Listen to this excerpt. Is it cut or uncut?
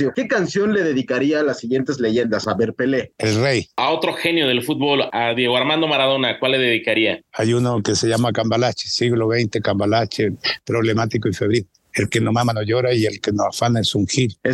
uncut